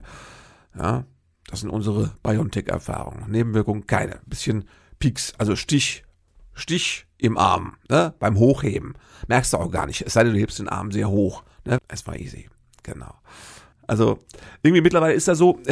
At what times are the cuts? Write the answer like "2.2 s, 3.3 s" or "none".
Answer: 11.8 s, 13.7 s